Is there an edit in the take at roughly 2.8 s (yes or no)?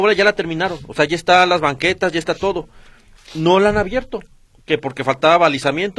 no